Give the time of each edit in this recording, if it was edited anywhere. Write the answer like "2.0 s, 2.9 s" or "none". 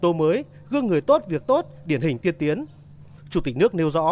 3.2 s